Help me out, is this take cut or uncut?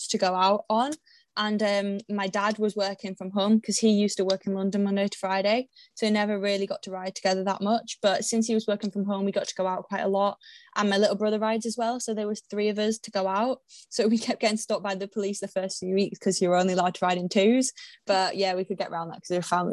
uncut